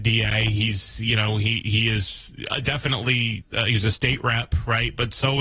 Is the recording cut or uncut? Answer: uncut